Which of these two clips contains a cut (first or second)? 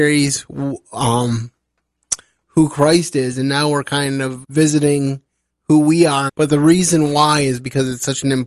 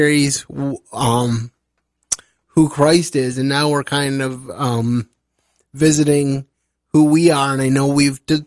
first